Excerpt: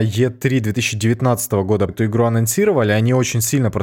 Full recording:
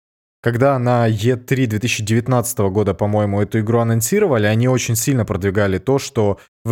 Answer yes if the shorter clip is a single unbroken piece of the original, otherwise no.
no